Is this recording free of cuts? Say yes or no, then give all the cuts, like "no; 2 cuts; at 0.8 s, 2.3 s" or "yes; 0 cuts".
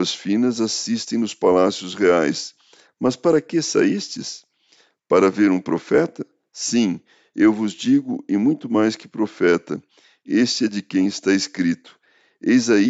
yes; 0 cuts